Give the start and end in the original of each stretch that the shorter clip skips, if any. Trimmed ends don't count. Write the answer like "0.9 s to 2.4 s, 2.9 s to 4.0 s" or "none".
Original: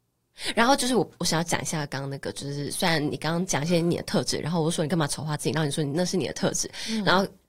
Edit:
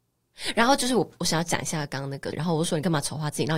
2.3 s to 4.4 s

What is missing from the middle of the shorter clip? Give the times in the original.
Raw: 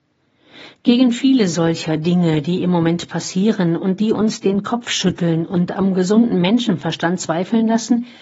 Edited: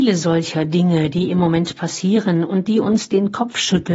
none

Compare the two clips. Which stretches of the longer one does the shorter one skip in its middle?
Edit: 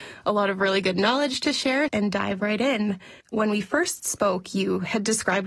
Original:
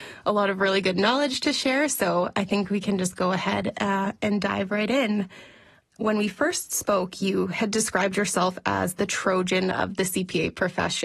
1.9 s to 4.2 s, 5.5 s to 5.9 s

